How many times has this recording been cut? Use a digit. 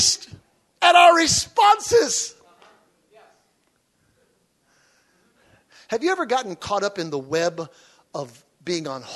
0